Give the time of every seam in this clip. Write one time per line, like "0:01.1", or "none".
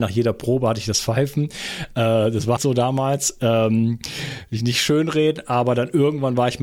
0:02.6